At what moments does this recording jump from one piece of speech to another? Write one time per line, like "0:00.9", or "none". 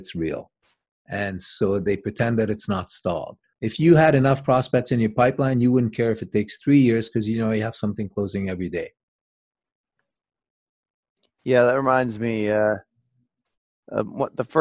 0:03.5